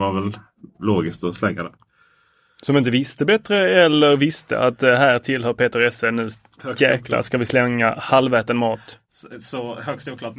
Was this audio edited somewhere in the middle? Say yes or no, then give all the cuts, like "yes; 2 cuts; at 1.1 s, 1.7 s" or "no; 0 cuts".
no; 0 cuts